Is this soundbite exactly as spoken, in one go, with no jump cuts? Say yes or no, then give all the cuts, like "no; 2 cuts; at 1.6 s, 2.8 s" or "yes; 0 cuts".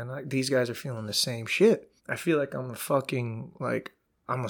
no; 1 cut; at 2.0 s